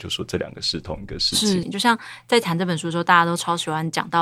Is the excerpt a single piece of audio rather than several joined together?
no; 1 cut; at 1.6 s

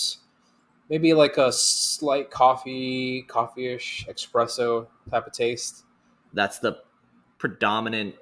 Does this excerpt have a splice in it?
yes; 1 cut; at 6.3 s

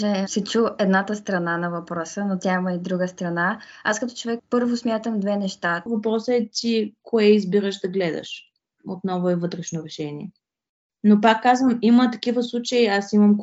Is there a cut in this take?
yes; 2 cuts; at 4.4 s, 5.9 s

